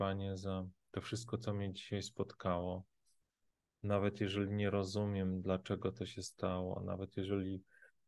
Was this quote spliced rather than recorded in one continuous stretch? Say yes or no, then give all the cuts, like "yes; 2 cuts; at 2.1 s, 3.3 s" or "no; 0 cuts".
no; 0 cuts